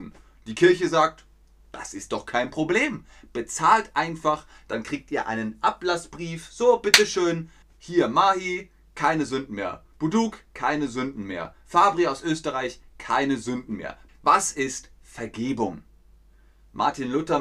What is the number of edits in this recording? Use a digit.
2